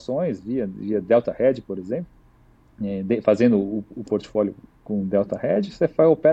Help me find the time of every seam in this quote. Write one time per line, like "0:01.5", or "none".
none